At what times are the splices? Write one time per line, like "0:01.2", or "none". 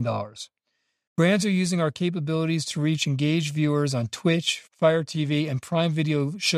0:01.1
0:04.7